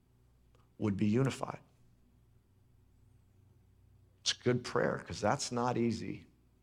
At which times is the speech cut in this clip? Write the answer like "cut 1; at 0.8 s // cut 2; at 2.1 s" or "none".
none